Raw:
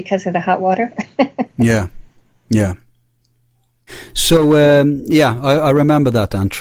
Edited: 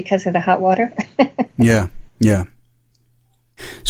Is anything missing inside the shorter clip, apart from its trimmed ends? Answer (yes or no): yes